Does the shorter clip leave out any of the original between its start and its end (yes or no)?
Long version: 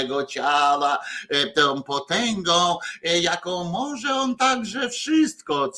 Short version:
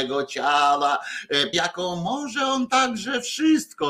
yes